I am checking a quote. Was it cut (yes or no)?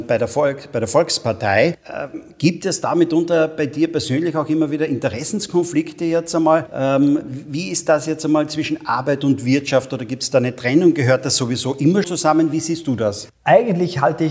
yes